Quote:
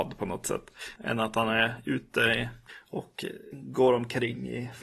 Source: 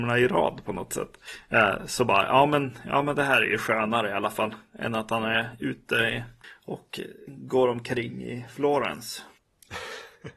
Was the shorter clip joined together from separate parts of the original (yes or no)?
yes